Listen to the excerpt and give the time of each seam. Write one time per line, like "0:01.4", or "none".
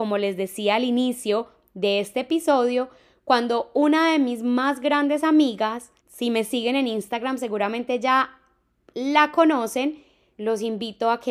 0:06.0
0:10.3